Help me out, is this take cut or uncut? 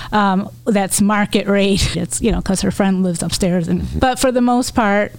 cut